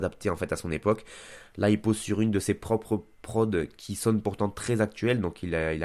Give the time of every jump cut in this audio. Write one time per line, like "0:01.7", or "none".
none